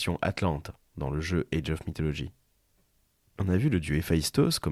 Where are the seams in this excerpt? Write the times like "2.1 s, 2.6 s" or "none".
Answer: none